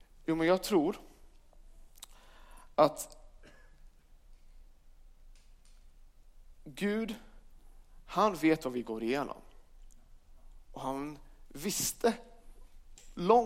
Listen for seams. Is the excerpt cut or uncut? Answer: uncut